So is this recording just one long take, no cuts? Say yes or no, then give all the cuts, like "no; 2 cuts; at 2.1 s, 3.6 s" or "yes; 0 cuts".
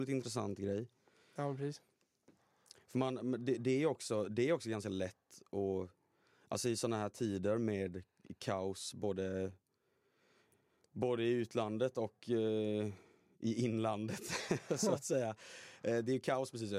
yes; 0 cuts